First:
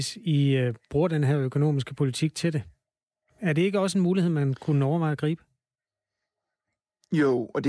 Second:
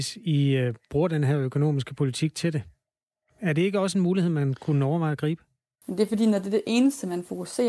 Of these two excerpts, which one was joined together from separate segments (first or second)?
second